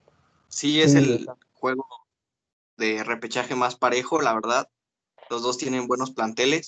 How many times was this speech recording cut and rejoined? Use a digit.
0